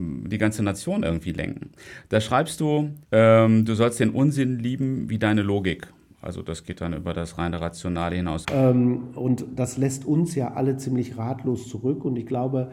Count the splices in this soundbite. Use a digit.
2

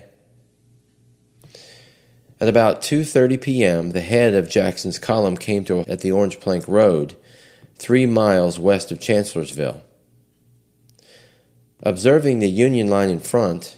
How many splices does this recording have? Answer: 1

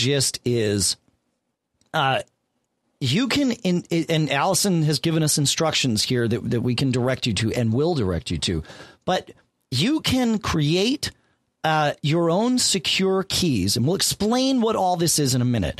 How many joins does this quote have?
0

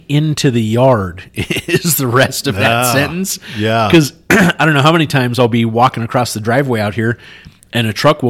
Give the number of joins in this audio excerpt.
0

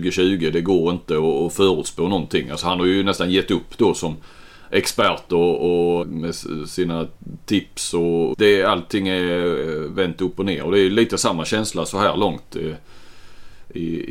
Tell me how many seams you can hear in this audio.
2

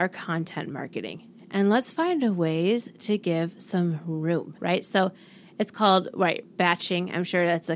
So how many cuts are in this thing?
1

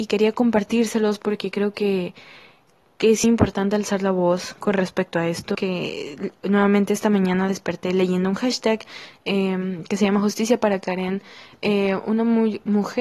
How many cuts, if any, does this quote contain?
2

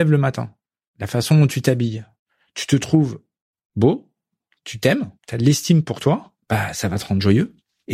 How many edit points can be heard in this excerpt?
2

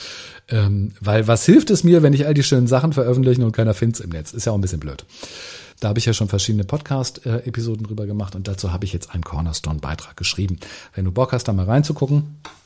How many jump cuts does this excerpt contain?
1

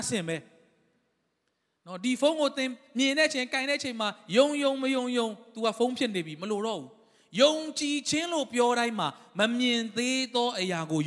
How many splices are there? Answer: 0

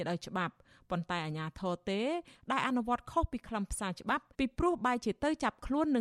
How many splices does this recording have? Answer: 1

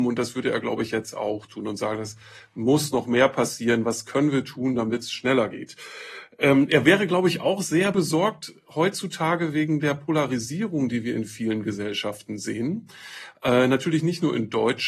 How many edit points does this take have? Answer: 0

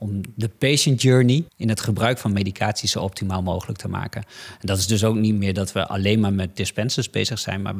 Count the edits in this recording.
1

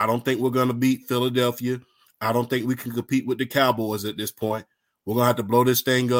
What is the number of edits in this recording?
0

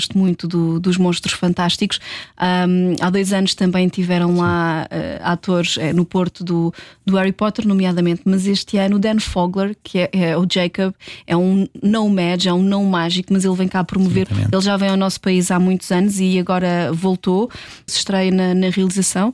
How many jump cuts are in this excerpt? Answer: 2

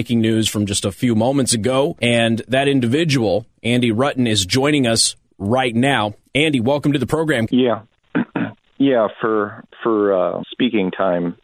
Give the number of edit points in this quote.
2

